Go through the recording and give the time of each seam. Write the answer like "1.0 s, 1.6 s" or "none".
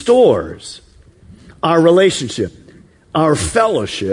none